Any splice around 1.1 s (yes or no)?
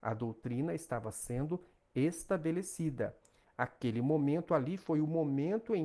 no